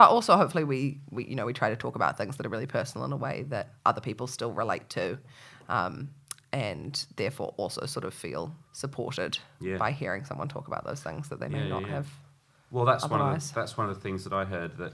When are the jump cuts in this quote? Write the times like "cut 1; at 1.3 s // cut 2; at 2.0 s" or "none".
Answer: cut 1; at 3.8 s // cut 2; at 8.7 s